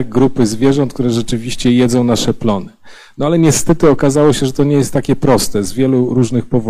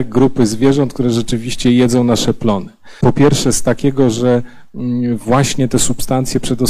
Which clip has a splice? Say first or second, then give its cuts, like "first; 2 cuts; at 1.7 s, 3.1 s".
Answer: second; 1 cut; at 3.0 s